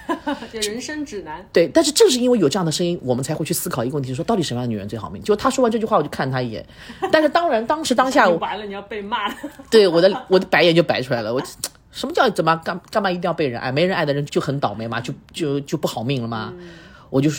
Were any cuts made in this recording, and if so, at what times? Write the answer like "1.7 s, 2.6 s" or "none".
14.3 s